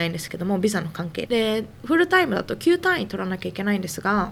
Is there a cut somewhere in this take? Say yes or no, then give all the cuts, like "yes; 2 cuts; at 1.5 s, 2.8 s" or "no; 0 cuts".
yes; 1 cut; at 1.3 s